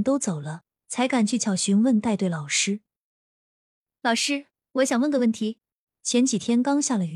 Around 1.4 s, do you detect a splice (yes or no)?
yes